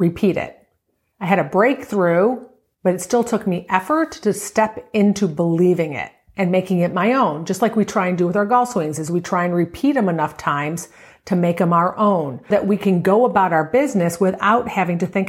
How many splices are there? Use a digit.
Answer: 1